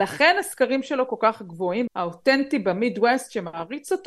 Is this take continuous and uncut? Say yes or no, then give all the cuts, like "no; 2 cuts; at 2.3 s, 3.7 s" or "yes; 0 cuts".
no; 1 cut; at 1.9 s